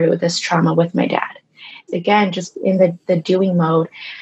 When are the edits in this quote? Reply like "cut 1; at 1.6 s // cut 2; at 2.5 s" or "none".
cut 1; at 1.9 s